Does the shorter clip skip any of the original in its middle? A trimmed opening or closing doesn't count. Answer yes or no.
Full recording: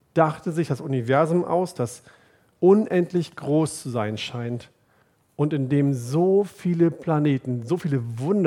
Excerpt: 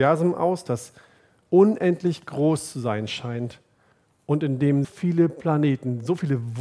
yes